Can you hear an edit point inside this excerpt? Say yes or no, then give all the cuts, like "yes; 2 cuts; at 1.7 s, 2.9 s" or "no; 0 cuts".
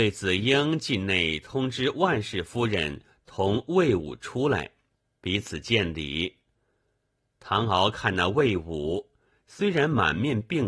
no; 0 cuts